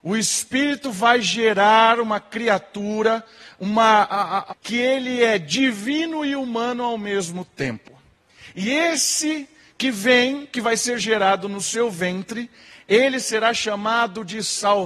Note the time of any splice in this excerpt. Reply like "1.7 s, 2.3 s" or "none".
4.5 s

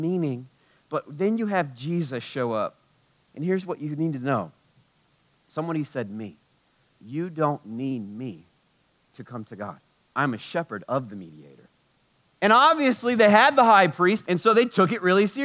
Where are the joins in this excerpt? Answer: 10.1 s, 12.3 s, 14.2 s

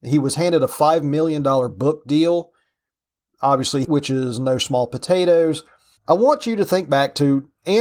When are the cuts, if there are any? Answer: 3.8 s, 6.0 s

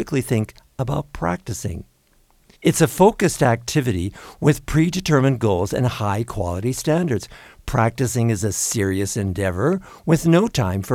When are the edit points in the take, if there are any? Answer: 2.5 s

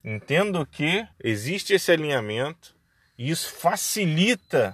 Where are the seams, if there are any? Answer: 1.1 s

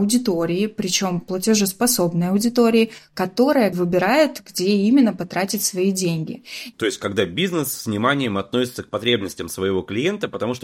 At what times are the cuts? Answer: 3.7 s, 6.7 s

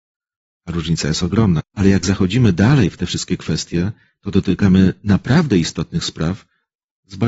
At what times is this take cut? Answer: 1.6 s

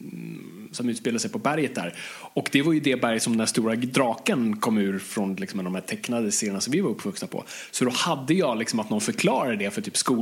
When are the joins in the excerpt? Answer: none

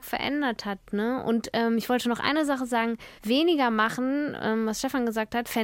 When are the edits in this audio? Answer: 3.2 s

